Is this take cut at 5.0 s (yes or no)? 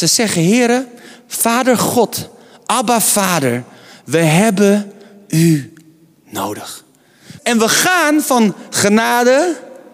no